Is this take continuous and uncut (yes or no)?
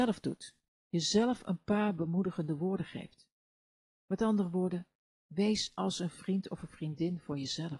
yes